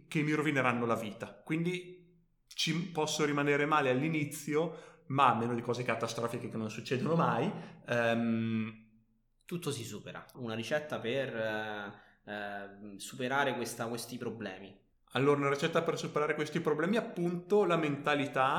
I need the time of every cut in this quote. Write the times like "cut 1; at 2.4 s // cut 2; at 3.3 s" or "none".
cut 1; at 10.3 s // cut 2; at 14.9 s